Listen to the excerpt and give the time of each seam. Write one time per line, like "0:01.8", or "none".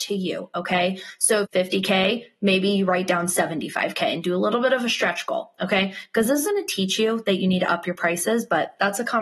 0:01.4
0:06.4